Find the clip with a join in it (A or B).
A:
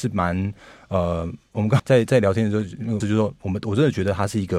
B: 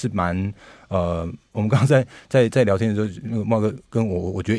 A